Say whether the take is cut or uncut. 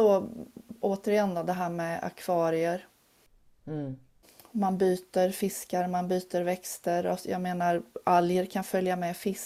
uncut